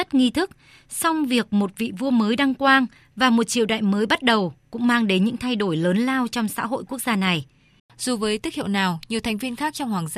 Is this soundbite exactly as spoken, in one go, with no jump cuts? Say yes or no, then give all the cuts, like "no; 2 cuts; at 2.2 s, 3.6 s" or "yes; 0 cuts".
no; 1 cut; at 7.8 s